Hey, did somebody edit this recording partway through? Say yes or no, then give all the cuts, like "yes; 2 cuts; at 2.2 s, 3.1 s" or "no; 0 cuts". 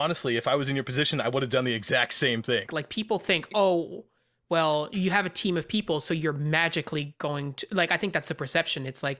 yes; 1 cut; at 2.7 s